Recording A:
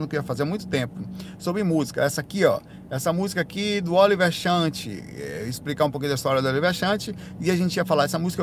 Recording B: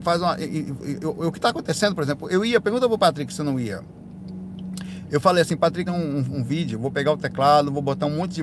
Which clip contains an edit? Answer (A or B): B